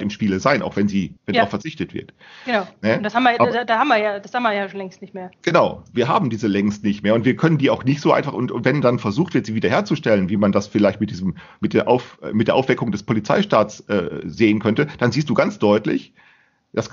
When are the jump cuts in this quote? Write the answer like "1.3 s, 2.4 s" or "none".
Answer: 1.2 s